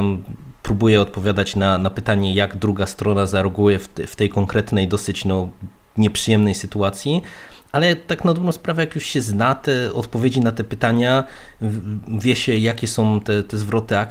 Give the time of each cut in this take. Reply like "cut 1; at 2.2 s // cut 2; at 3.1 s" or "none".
none